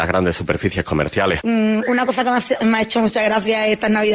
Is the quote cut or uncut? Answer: cut